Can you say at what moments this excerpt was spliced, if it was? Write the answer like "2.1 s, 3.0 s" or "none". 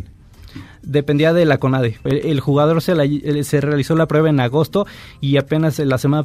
2.1 s